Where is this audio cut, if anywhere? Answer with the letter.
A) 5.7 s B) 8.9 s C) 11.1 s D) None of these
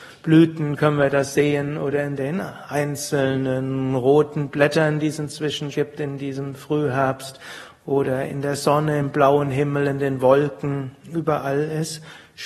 A